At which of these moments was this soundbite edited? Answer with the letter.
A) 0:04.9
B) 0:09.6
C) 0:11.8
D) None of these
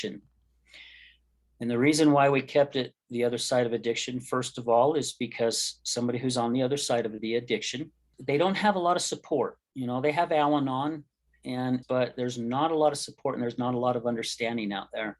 C